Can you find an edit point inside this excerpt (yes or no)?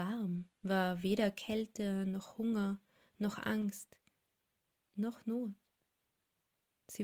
no